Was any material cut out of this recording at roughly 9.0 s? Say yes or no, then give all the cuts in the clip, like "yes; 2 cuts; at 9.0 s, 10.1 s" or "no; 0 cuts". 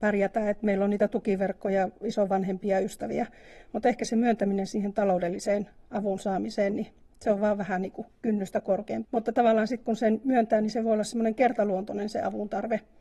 yes; 1 cut; at 9.0 s